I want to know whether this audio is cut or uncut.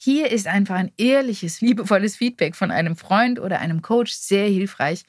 cut